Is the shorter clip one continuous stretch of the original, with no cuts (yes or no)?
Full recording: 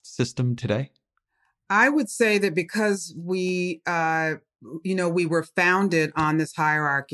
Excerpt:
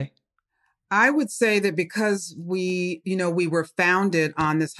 no